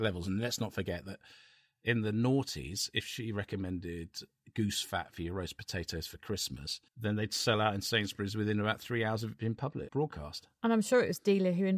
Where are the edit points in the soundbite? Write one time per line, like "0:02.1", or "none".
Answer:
0:06.9
0:09.9